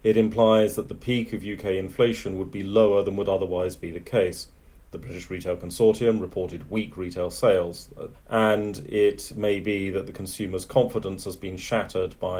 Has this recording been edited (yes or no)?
yes